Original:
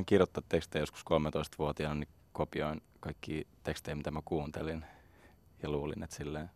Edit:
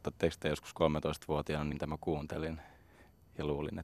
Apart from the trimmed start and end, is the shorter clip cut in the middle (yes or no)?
yes